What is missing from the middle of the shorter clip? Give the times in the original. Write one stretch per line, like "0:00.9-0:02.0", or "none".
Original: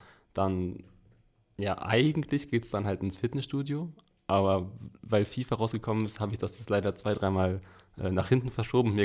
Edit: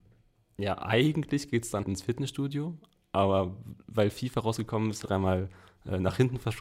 0:02.8-0:03.0
0:06.2-0:07.1

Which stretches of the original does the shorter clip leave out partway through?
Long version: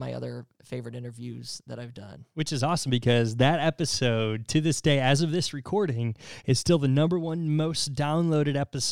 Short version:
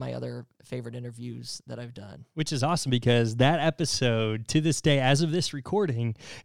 none

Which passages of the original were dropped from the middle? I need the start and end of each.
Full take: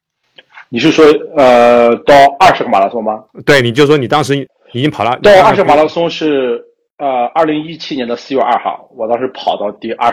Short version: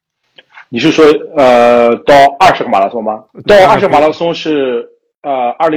0:03.4-0:05.2

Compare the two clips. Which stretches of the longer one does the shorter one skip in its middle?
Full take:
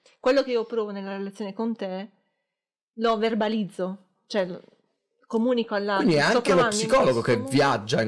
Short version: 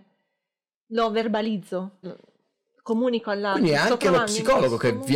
0:04.1-0:04.5

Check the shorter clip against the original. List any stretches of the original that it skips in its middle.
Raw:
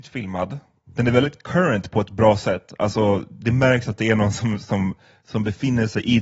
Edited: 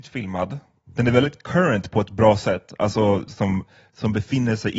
0:03.3-0:04.6

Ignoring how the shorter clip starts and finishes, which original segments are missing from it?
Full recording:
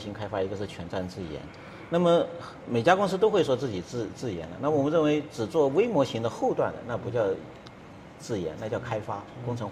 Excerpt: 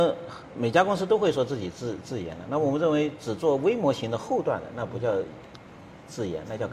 none

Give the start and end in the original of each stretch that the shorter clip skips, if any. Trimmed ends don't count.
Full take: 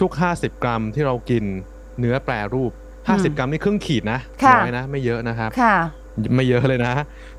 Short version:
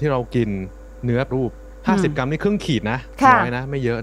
0:02.2-0:02.5

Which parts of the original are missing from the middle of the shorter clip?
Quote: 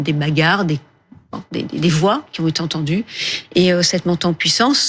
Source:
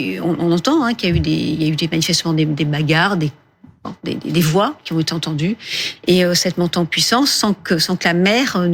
none

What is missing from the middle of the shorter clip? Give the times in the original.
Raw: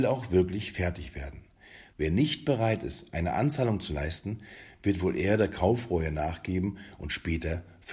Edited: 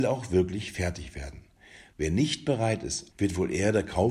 0:03.1-0:04.8

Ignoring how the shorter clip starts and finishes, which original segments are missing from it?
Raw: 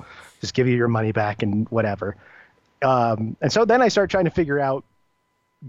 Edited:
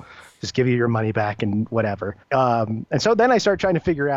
0:02.2-0:02.7

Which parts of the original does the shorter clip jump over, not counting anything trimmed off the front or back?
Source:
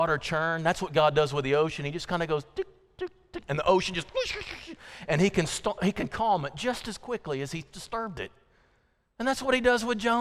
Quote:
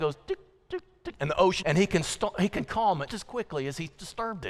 0:03.9-0:05.1
0:06.5-0:06.8

